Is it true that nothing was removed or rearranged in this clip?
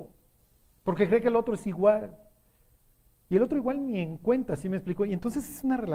yes; 0 cuts

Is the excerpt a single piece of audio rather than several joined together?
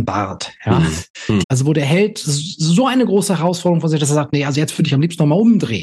no; 1 cut; at 1.4 s

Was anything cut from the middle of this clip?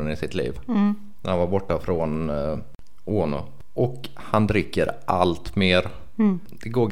no; 0 cuts

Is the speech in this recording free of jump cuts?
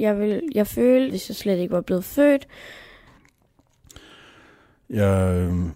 no; 1 cut; at 1.1 s

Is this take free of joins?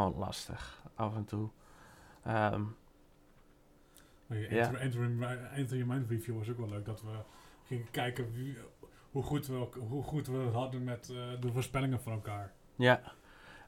yes; 0 cuts

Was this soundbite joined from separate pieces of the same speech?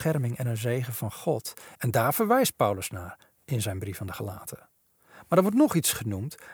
yes; 1 cut; at 1.7 s

